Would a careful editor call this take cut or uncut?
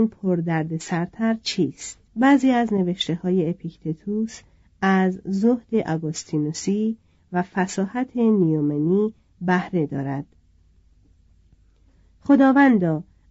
cut